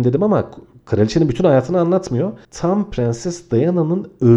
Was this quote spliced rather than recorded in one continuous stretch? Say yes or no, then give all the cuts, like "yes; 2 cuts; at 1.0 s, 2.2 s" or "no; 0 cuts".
yes; 1 cut; at 2.4 s